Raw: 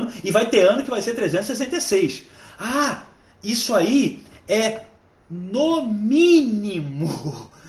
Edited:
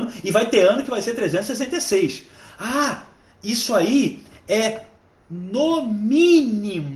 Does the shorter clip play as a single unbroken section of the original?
yes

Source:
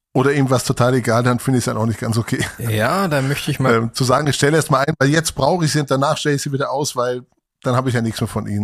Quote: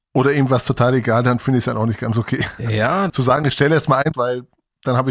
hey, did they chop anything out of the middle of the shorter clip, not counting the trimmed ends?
yes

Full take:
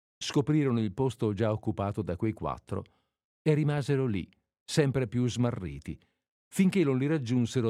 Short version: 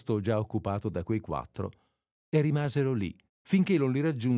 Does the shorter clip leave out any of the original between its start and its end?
yes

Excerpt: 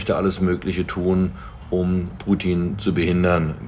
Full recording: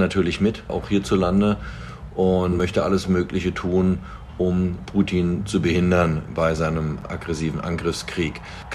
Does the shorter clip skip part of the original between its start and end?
no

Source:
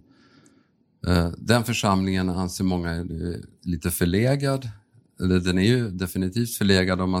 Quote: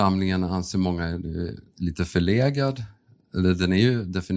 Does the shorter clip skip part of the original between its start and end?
no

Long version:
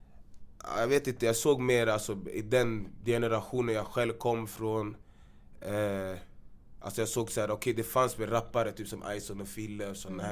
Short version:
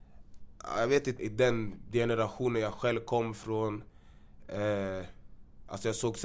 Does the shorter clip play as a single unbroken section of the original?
no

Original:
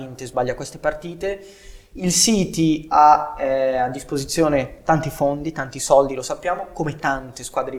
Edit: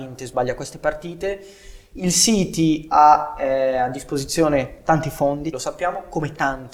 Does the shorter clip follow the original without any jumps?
no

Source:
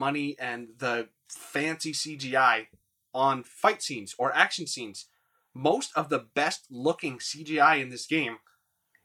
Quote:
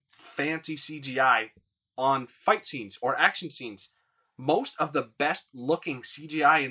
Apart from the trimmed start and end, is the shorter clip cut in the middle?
no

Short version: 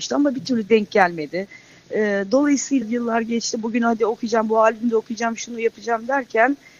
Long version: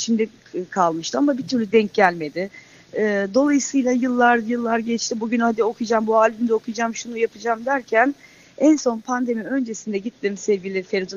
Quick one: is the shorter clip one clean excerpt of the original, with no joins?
no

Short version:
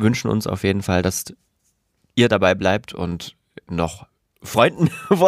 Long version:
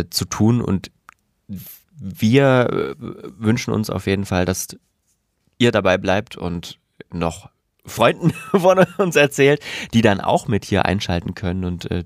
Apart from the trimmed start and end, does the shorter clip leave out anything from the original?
no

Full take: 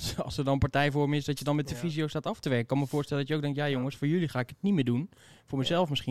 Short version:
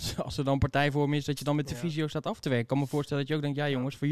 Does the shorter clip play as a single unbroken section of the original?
yes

